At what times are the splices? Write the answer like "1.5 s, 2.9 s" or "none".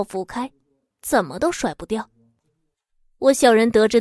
0.9 s